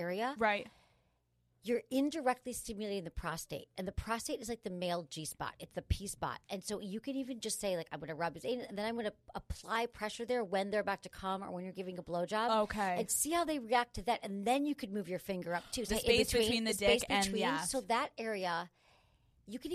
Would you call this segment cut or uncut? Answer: cut